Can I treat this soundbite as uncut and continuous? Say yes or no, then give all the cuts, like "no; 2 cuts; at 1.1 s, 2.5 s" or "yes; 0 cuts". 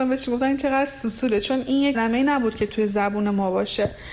no; 1 cut; at 1.9 s